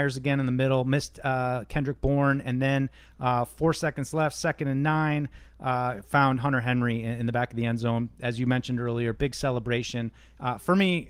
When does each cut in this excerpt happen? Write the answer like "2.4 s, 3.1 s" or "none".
none